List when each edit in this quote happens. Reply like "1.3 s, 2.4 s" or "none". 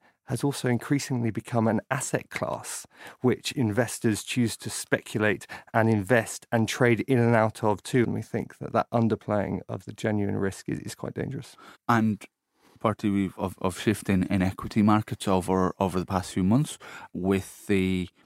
8.0 s, 11.7 s, 13.4 s